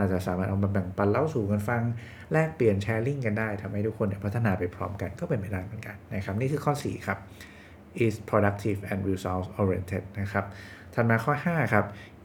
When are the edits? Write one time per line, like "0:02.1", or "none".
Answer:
none